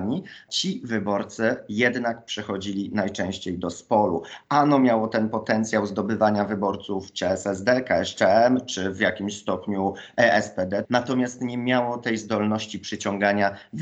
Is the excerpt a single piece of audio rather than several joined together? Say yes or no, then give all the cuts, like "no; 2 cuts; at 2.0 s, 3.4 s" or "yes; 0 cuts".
no; 1 cut; at 10.8 s